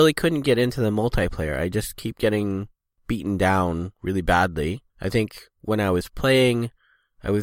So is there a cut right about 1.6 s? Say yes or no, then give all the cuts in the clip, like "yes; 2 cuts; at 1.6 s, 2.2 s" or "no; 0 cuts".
no; 1 cut; at 4.9 s